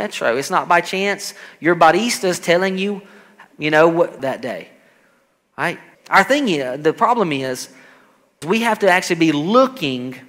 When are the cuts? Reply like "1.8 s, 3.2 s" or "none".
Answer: 4.2 s, 5.9 s, 8.4 s